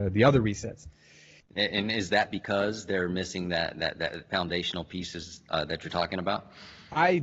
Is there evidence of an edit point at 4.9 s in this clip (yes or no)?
no